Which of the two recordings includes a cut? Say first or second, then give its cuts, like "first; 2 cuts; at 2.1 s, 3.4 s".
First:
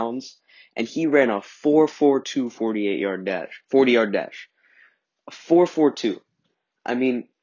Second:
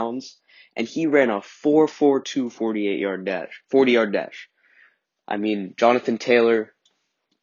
second; 1 cut; at 5.2 s